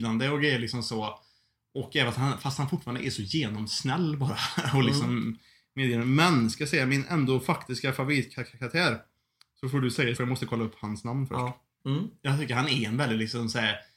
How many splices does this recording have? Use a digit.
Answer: 2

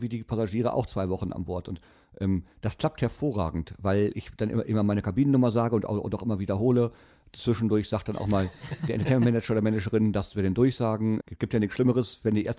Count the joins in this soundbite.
1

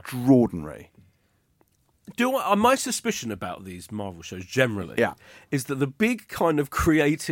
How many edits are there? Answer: 0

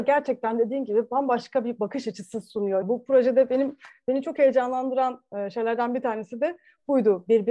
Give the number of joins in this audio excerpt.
1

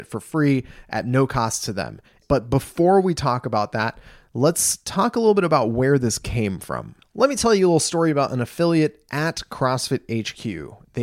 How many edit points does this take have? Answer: 1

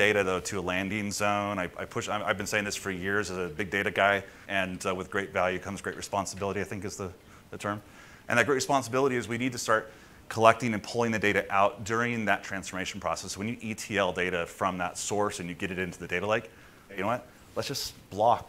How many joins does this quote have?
2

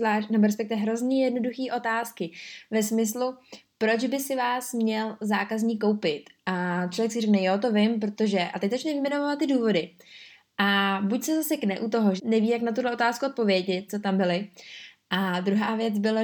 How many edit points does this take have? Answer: 2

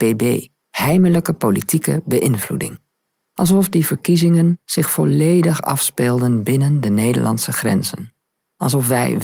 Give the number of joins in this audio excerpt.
1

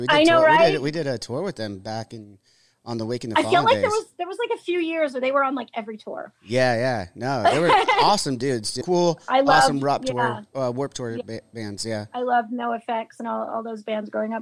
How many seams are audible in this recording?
1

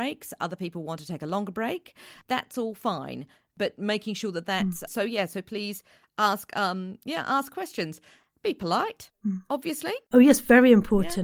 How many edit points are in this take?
2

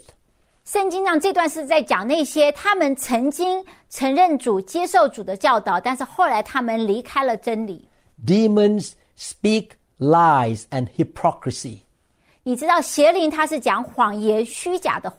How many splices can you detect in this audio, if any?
0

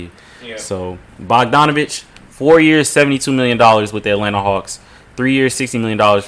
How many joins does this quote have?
0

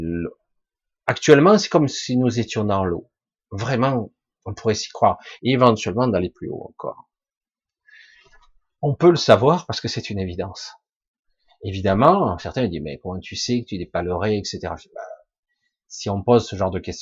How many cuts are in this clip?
1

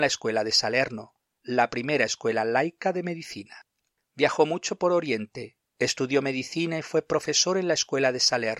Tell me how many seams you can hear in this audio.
1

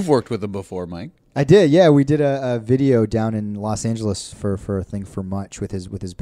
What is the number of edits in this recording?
1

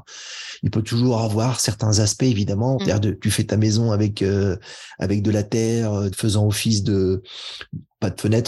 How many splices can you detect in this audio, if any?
2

